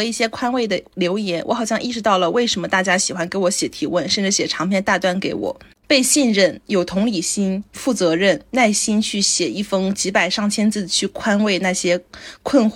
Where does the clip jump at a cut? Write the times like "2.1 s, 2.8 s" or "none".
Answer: 5.8 s